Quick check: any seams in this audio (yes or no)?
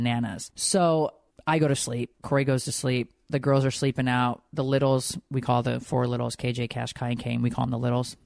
no